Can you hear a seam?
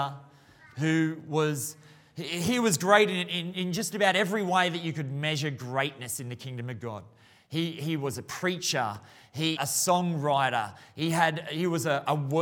yes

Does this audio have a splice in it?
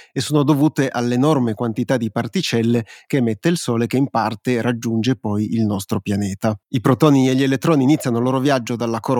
yes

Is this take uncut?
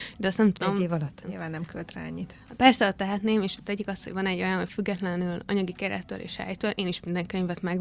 no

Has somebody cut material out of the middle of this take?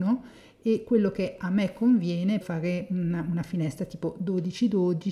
yes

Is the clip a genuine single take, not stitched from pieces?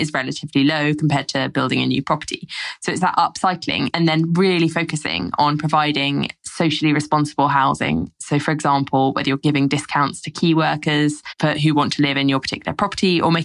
yes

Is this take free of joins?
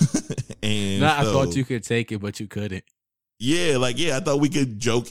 yes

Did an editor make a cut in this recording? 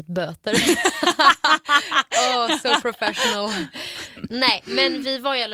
no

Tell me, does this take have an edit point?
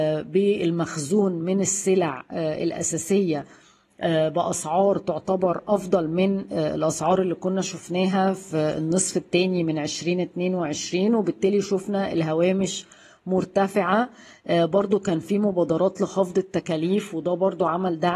no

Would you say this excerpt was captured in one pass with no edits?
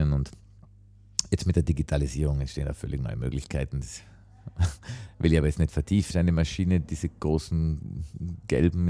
no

